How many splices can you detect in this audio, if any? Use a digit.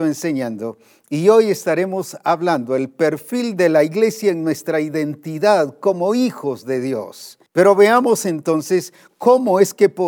1